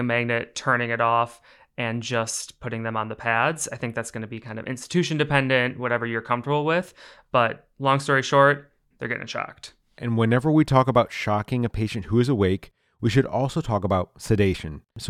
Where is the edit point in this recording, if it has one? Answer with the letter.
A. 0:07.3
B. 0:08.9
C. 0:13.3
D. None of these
B